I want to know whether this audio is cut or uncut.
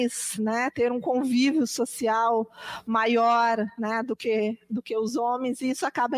uncut